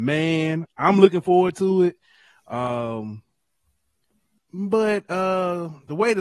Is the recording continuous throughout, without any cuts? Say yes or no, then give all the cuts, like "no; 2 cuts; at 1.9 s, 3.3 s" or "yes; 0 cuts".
no; 1 cut; at 4.4 s